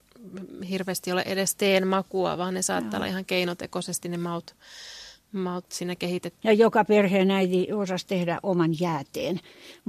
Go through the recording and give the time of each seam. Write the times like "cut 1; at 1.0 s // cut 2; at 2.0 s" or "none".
cut 1; at 6.4 s